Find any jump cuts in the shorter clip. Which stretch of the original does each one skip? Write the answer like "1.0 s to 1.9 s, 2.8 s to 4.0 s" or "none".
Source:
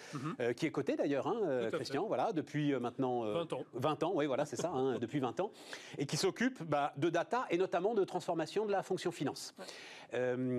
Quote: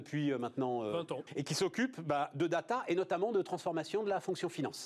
3.7 s to 5.9 s